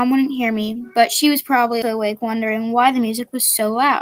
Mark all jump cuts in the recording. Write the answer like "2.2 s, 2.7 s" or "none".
1.8 s